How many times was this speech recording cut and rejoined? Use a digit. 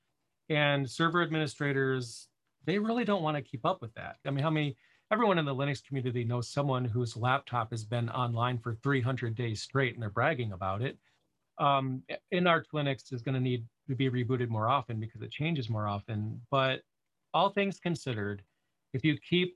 1